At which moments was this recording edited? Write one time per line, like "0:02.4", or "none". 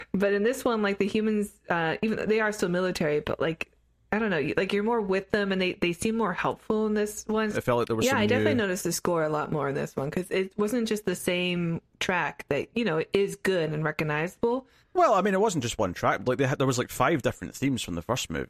0:07.5
0:14.8

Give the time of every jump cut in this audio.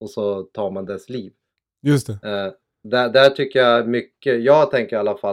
none

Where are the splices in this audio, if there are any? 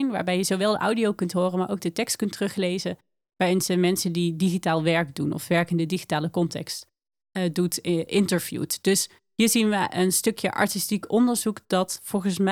none

